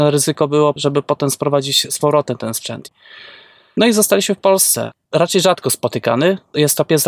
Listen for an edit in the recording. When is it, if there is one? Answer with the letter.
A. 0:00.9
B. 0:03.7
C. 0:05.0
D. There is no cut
C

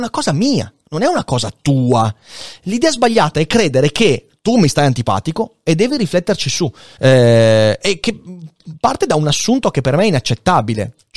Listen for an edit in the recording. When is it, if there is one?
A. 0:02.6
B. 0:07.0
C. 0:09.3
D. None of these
B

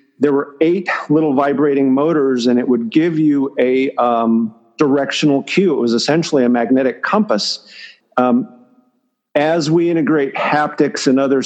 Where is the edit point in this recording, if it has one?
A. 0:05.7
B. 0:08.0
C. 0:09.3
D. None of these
B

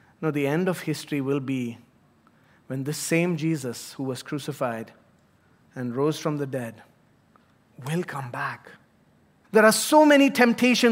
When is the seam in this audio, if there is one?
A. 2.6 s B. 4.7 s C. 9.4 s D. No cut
C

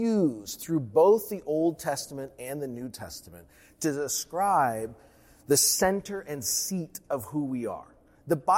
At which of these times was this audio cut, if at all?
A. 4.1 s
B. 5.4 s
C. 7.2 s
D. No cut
D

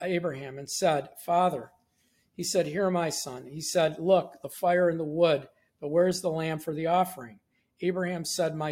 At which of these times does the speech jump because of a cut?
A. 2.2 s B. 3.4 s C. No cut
C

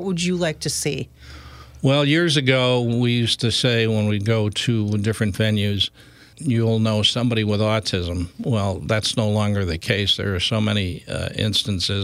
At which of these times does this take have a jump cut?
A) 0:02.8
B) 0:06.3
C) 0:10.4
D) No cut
B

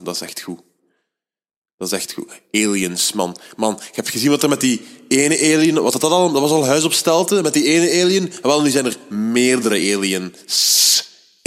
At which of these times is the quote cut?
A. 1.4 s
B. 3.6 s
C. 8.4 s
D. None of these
D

